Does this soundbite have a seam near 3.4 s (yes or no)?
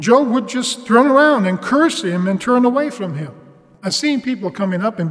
no